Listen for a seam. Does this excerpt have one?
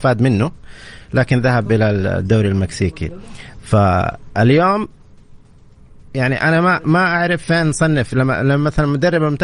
no; 0 cuts

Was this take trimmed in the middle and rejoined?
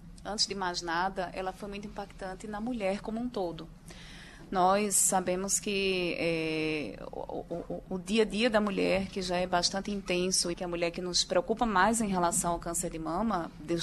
yes; 1 cut; at 10.5 s

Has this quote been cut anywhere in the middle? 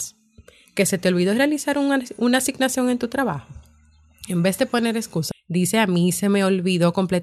yes; 1 cut; at 5.3 s

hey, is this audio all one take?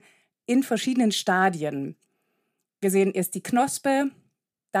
yes; 0 cuts

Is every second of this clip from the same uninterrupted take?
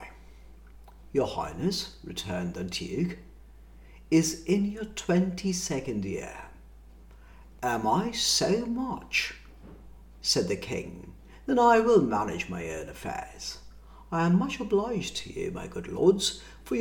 yes; 0 cuts

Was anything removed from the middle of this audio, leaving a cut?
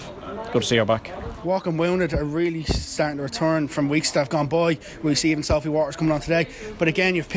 yes; 1 cut; at 3.7 s

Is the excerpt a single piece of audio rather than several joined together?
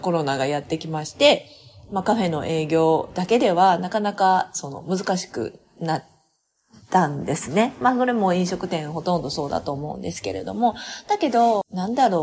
yes; 0 cuts

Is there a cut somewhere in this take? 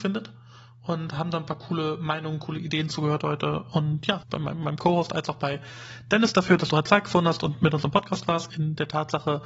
yes; 2 cuts; at 4.2 s, 8.5 s

